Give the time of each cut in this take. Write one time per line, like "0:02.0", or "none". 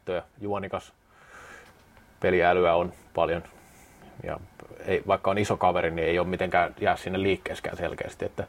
none